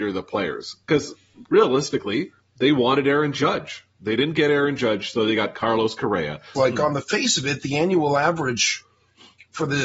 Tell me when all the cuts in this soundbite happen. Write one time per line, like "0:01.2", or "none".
0:06.6